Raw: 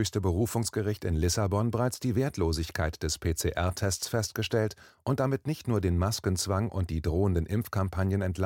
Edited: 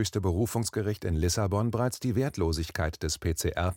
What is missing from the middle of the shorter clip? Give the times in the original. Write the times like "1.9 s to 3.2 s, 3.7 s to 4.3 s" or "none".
none